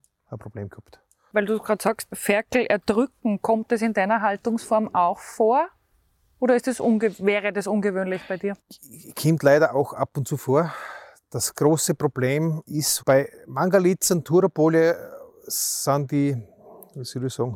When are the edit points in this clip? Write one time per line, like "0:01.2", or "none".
0:02.1
0:08.6
0:13.0